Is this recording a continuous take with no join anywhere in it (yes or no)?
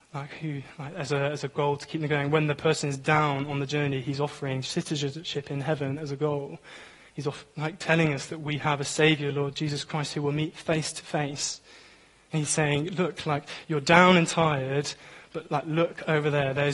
yes